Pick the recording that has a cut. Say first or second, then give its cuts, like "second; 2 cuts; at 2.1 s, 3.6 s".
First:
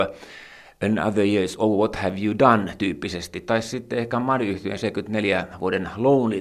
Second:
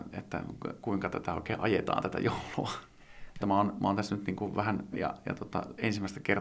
second; 2 cuts; at 3.4 s, 4.9 s